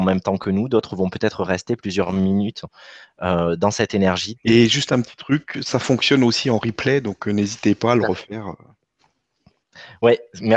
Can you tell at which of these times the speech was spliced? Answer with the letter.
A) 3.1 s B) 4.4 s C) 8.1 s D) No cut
B